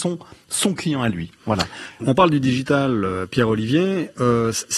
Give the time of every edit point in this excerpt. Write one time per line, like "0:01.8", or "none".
0:02.0